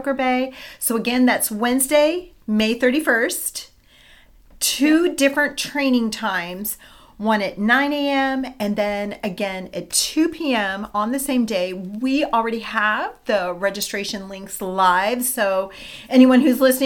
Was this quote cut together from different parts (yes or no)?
no